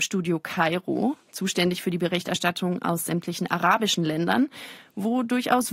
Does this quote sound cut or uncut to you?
uncut